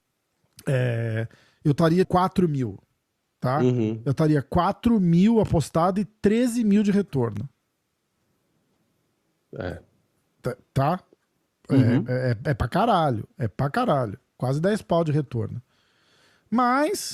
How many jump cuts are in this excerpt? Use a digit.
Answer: 1